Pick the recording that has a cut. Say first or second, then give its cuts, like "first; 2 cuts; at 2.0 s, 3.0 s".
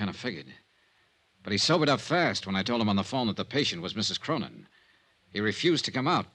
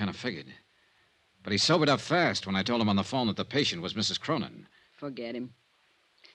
second; 1 cut; at 4.9 s